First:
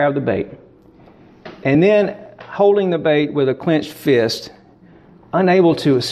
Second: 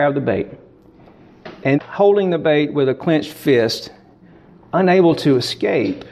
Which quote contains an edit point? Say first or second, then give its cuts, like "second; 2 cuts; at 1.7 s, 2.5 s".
second; 1 cut; at 1.7 s